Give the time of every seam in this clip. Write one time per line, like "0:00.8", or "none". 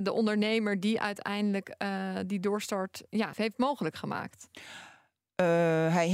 0:03.3